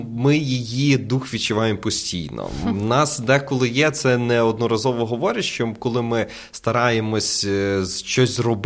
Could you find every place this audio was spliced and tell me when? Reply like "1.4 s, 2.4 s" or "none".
none